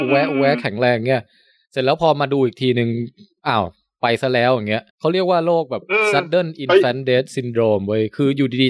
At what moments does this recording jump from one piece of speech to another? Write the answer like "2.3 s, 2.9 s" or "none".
4.9 s